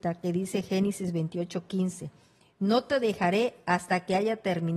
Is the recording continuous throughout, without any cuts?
yes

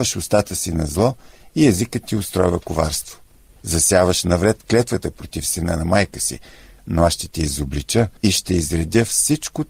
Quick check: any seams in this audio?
yes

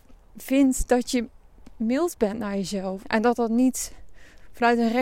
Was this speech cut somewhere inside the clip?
yes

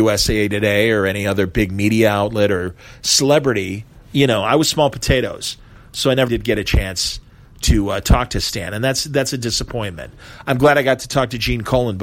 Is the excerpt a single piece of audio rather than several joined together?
no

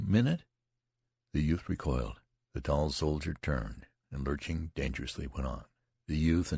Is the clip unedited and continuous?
no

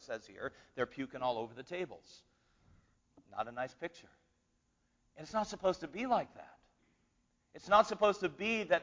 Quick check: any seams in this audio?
no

